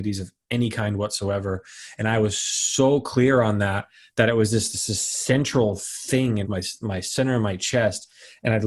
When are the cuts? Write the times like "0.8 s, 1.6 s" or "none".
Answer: 6.4 s